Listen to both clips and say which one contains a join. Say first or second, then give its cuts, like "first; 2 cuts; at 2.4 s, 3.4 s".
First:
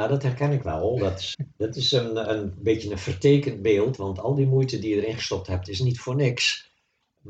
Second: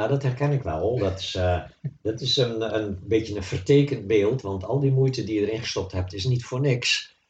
first; 1 cut; at 1.3 s